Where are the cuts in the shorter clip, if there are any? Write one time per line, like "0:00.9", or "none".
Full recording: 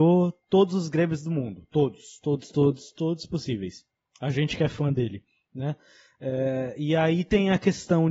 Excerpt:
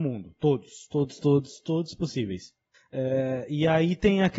0:02.7